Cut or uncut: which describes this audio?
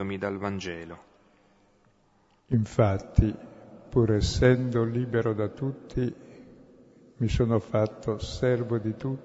uncut